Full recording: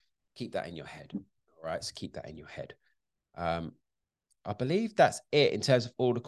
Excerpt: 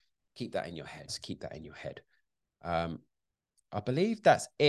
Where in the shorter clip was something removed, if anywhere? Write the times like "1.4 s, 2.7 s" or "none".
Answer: 1.1 s